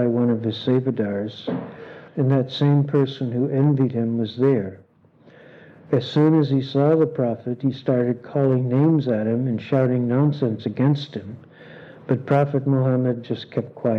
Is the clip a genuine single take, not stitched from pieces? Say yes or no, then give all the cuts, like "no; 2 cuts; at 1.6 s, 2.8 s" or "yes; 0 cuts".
no; 1 cut; at 2.1 s